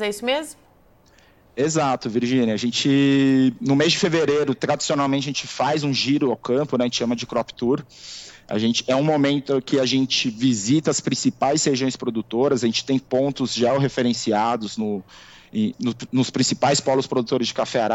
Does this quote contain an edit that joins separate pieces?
yes; 1 cut; at 15.7 s

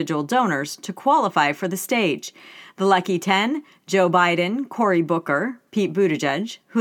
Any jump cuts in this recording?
no; 0 cuts

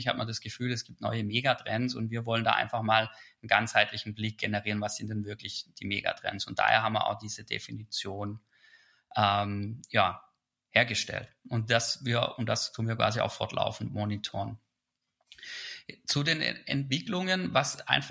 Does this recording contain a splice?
no; 0 cuts

